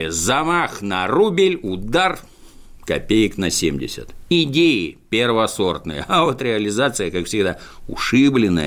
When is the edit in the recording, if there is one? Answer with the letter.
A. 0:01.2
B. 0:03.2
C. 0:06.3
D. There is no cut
D